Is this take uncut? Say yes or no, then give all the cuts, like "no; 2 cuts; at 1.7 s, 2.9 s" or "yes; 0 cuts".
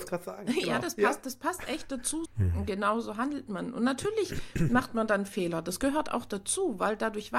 no; 1 cut; at 2.3 s